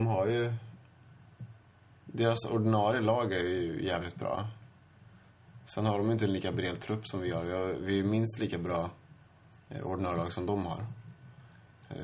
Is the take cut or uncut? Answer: uncut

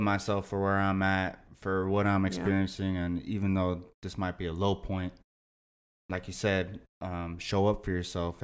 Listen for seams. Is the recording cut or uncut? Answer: uncut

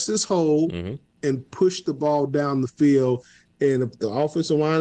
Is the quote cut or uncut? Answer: uncut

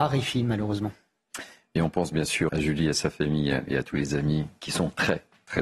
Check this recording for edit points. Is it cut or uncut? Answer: cut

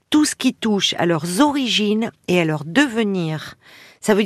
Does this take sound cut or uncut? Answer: uncut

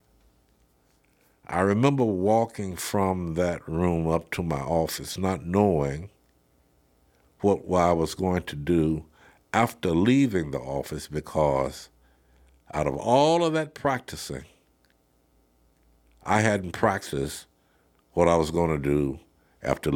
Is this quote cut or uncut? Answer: uncut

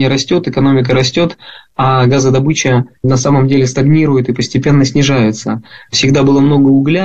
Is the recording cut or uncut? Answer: cut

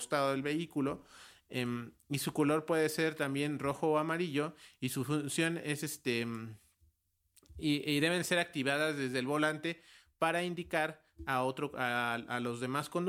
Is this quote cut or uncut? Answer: uncut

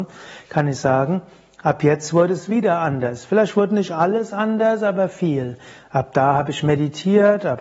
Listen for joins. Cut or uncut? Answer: uncut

